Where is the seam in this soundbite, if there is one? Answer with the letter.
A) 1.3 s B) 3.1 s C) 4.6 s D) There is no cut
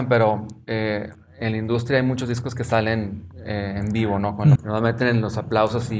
C